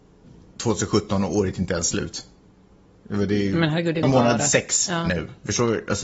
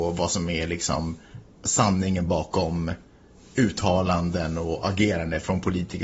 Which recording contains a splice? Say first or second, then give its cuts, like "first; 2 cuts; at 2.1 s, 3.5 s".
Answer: first; 1 cut; at 4.0 s